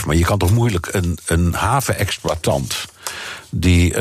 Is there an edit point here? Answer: no; 0 cuts

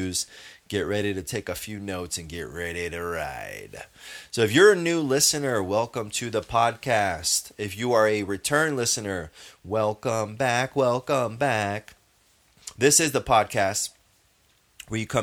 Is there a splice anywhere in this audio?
no; 0 cuts

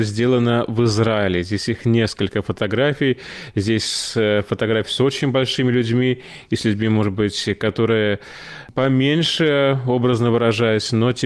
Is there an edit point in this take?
no; 0 cuts

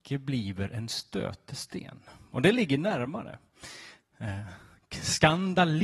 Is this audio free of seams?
no; 1 cut; at 4.0 s

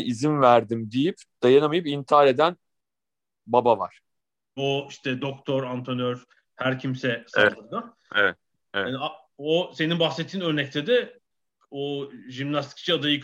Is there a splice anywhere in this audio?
yes; 1 cut; at 4.6 s

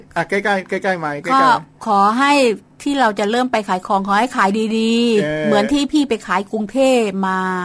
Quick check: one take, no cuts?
yes; 0 cuts

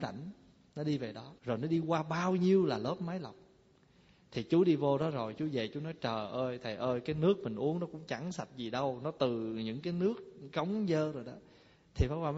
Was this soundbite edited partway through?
yes; 1 cut; at 1.4 s

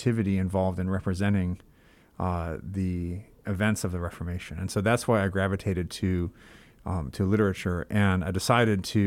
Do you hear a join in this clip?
no; 0 cuts

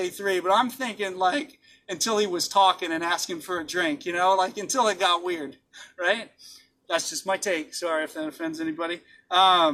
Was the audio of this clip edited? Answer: no; 0 cuts

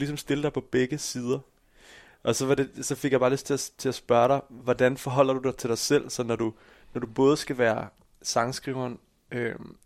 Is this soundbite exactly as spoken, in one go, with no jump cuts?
yes; 0 cuts

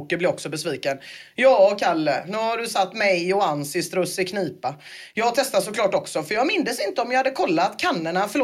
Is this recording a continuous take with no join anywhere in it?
yes; 0 cuts

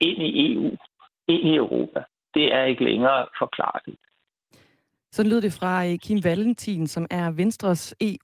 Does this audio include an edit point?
no; 0 cuts

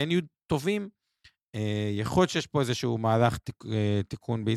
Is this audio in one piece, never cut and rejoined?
yes; 0 cuts

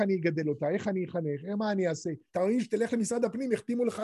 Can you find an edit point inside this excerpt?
yes; 1 cut; at 2.3 s

